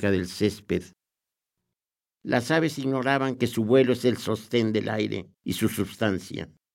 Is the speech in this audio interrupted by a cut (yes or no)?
no